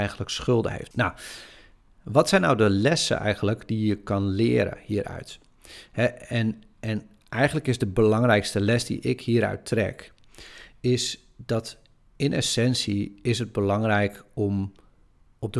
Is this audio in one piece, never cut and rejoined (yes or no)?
no